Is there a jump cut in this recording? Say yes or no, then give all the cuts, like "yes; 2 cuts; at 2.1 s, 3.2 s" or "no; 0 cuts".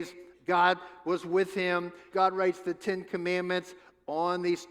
yes; 1 cut; at 2.1 s